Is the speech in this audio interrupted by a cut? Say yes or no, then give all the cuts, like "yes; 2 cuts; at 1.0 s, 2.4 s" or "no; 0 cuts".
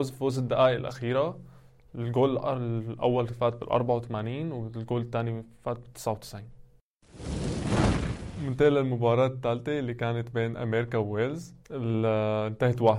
yes; 1 cut; at 11.6 s